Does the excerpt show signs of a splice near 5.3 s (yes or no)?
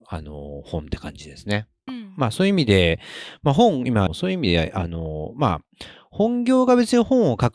no